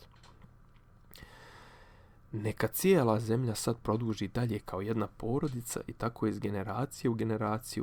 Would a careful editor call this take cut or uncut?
uncut